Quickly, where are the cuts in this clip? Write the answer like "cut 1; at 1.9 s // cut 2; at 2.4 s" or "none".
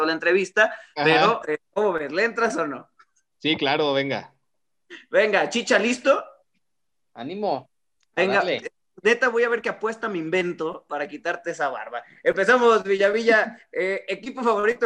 none